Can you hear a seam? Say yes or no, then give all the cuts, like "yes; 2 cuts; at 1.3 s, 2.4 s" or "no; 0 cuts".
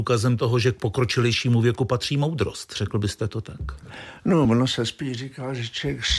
no; 0 cuts